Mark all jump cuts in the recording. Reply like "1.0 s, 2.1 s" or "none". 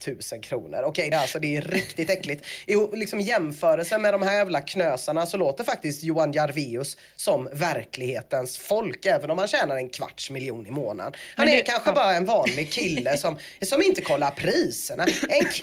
1.1 s

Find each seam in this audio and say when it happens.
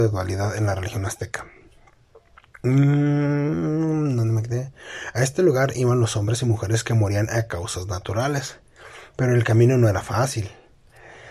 none

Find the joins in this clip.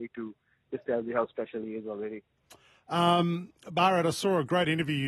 none

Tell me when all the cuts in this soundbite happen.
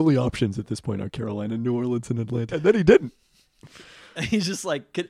2.5 s

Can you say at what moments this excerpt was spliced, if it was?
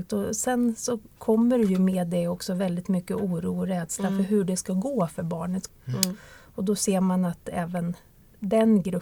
5.7 s

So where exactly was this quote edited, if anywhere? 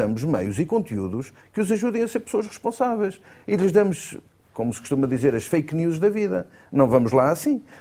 none

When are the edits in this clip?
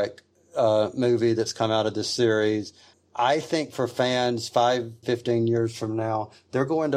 5.0 s

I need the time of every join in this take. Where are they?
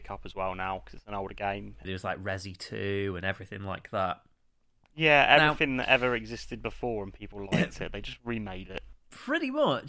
1.8 s

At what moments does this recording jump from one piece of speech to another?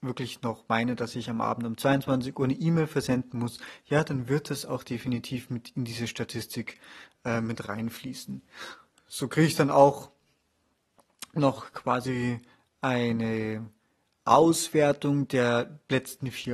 none

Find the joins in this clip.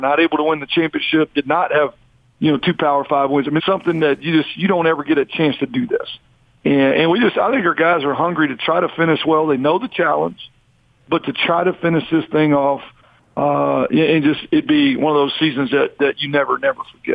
3.6 s

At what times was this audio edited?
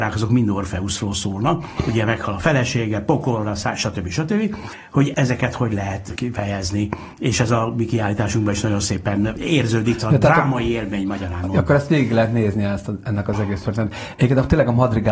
none

